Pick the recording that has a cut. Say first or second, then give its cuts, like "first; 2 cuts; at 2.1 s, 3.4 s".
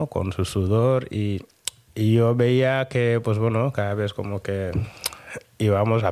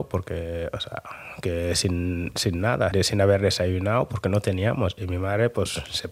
second; 1 cut; at 2.9 s